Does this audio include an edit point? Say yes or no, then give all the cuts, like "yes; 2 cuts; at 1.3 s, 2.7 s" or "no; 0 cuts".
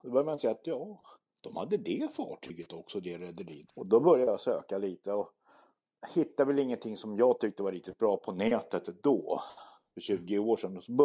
yes; 1 cut; at 3.7 s